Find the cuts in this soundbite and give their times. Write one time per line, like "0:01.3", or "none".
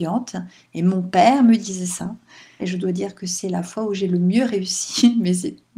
0:02.6